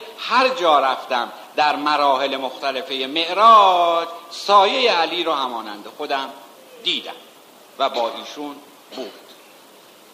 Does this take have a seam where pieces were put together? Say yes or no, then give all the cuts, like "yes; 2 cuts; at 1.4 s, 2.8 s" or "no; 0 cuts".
no; 0 cuts